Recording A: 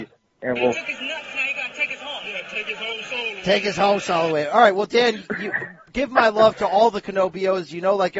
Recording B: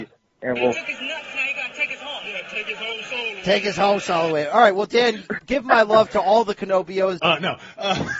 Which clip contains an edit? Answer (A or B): B